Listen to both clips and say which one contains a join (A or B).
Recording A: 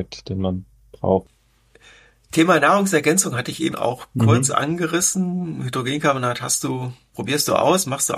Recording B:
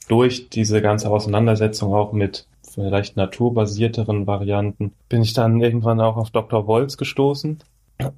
A